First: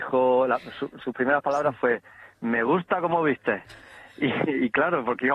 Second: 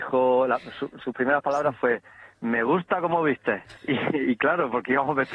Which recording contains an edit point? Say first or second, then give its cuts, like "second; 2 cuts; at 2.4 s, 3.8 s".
second; 1 cut; at 3.8 s